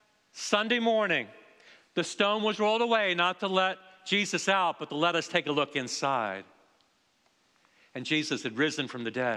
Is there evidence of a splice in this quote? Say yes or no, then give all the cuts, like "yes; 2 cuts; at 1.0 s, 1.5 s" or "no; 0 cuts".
no; 0 cuts